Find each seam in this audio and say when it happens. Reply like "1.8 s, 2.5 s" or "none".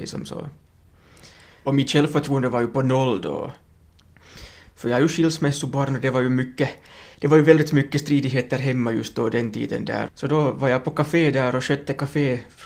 1.6 s, 10.1 s